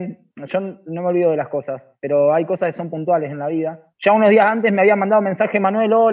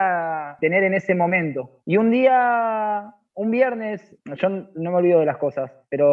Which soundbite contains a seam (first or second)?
second